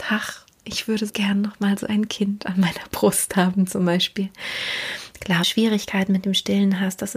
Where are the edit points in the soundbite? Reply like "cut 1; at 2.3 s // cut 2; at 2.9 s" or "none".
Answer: cut 1; at 1.1 s // cut 2; at 5.4 s